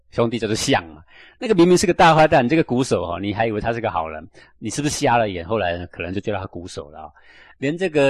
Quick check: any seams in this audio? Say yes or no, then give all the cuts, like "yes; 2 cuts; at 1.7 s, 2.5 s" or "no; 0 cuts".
no; 0 cuts